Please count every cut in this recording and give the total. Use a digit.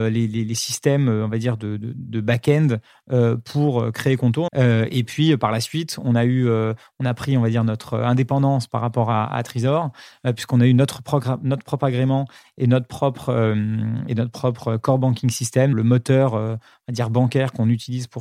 2